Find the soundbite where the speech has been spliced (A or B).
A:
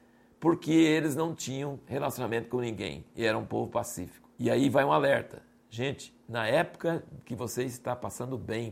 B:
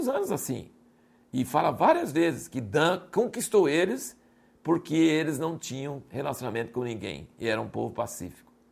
A